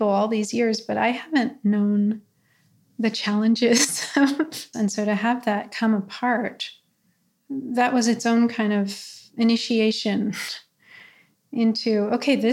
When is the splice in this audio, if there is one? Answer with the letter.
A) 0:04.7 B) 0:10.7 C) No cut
A